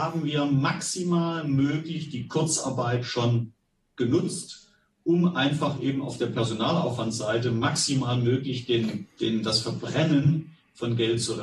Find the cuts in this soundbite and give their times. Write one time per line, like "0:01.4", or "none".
0:09.1